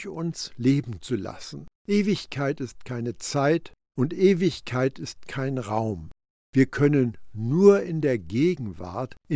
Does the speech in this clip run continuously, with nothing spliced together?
no; 1 cut; at 1.8 s

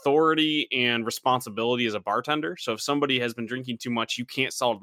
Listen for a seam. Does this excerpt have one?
no; 0 cuts

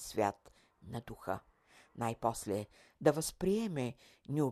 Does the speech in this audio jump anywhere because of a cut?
yes; 1 cut; at 2.9 s

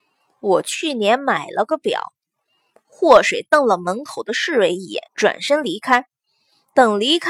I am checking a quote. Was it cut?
yes; 1 cut; at 5.1 s

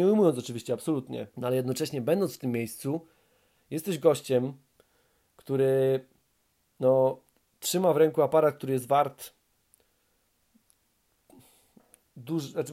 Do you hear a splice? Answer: yes; 1 cut; at 1.3 s

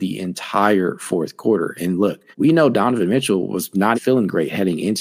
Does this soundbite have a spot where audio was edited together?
yes; 2 cuts; at 2.3 s, 3.9 s

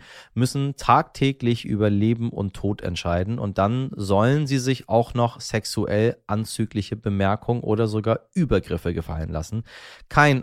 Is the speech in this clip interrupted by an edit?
no; 0 cuts

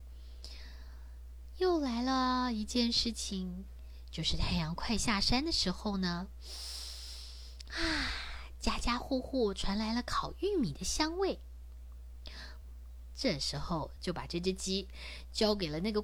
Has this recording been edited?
yes; 2 cuts; at 12.6 s, 14.0 s

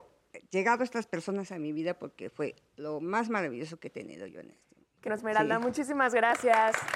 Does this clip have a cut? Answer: yes; 1 cut; at 5.1 s

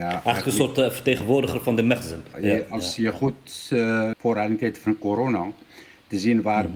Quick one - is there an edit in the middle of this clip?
yes; 2 cuts; at 2.3 s, 4.1 s

